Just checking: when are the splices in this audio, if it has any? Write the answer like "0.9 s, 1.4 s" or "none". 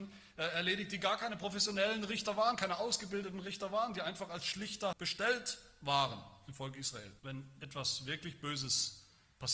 4.9 s, 7.2 s